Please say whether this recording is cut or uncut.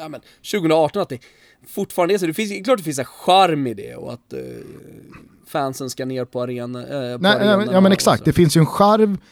uncut